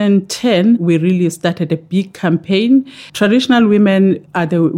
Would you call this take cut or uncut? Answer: cut